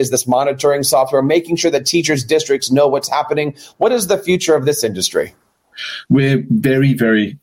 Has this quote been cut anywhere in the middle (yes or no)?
yes